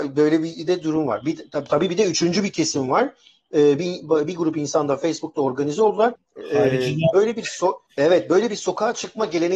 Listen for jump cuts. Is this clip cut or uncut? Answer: cut